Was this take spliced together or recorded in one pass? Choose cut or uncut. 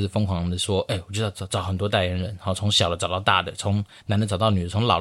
uncut